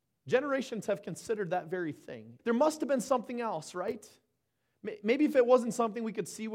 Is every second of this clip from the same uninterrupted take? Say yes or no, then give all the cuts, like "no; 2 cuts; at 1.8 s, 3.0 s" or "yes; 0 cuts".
no; 1 cut; at 2.4 s